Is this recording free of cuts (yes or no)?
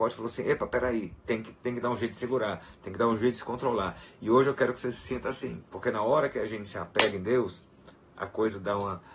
yes